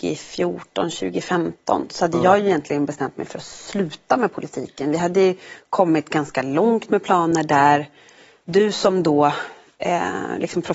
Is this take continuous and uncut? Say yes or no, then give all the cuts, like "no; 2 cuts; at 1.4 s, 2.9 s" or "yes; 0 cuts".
yes; 0 cuts